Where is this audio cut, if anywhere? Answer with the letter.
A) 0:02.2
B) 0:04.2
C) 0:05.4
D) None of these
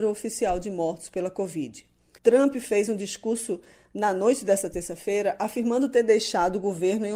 A